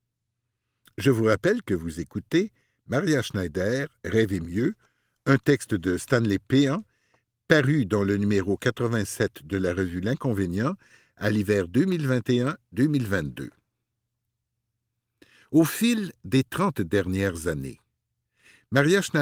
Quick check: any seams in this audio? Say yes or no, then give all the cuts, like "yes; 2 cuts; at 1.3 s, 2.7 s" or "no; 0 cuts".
no; 0 cuts